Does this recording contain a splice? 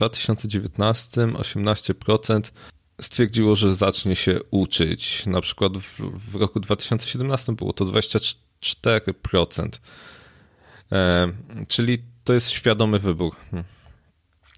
no; 0 cuts

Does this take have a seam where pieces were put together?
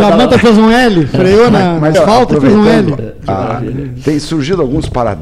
yes; 1 cut; at 1.9 s

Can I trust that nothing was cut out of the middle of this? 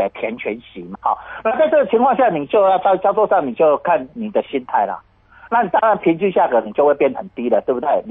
no; 2 cuts; at 0.9 s, 5.5 s

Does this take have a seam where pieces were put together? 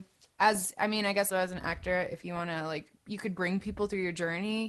yes; 2 cuts; at 1.3 s, 3.0 s

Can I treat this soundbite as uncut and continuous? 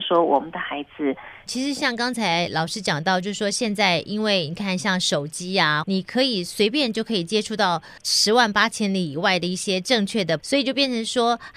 no; 3 cuts; at 1.5 s, 5.8 s, 10.4 s

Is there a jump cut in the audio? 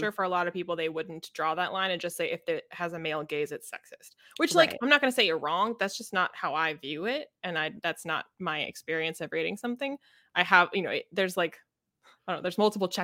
no; 0 cuts

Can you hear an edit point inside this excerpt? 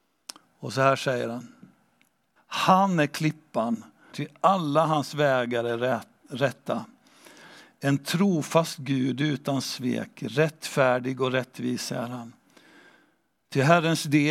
yes; 2 cuts; at 2.4 s, 4.1 s

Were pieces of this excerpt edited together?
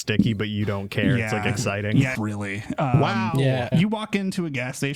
yes; 2 cuts; at 2.1 s, 3.7 s

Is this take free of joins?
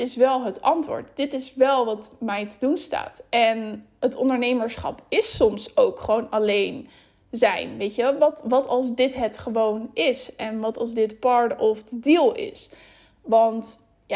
yes; 0 cuts

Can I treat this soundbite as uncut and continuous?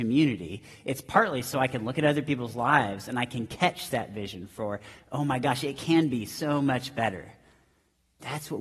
yes; 0 cuts

